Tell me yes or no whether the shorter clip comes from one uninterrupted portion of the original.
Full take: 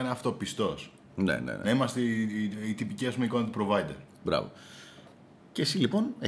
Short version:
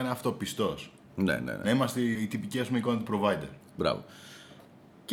no